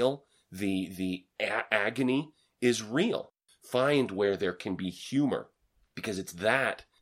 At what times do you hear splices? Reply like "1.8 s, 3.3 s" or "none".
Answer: 3.5 s